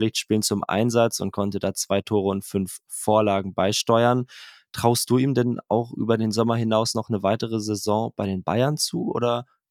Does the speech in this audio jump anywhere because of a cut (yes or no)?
no